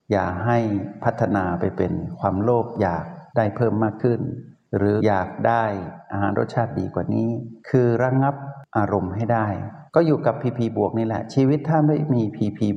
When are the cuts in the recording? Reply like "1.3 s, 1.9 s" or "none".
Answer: 5.0 s, 7.6 s, 9.9 s